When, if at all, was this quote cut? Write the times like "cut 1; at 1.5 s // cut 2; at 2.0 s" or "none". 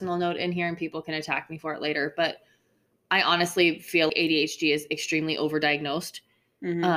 cut 1; at 4.1 s